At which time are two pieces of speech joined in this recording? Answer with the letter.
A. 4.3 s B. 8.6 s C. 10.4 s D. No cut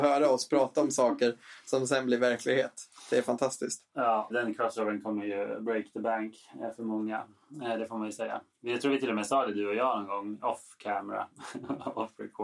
A